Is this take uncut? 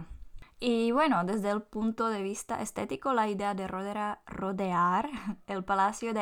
yes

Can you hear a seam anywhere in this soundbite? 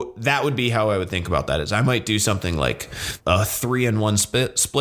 yes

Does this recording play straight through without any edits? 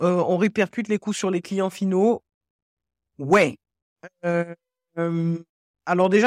yes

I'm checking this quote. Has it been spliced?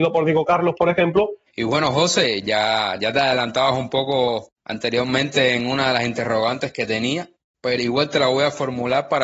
yes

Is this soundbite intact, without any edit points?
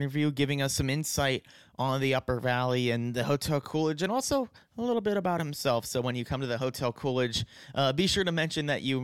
yes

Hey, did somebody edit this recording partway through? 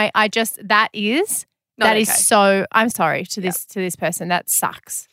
yes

